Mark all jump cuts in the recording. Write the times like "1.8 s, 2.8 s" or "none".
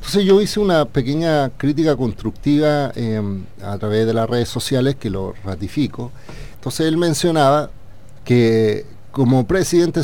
6.5 s, 8.2 s